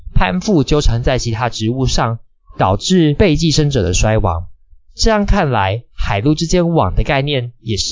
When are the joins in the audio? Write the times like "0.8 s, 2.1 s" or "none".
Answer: none